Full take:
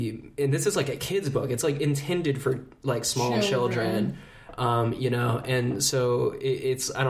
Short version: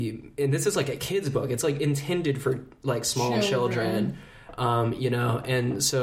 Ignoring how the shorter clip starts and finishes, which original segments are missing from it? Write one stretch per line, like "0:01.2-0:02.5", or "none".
none